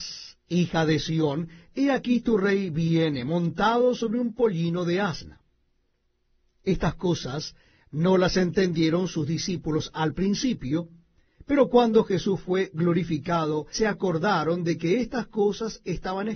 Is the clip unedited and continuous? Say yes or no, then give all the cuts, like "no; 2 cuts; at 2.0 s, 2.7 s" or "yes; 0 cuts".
no; 1 cut; at 13.7 s